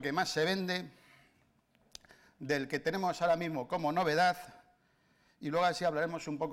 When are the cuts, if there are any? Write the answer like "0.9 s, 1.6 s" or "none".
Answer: none